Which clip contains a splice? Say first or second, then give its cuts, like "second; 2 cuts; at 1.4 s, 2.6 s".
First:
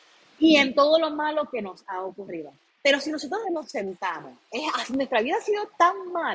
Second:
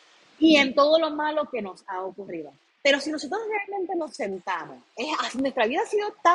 first; 1 cut; at 3.4 s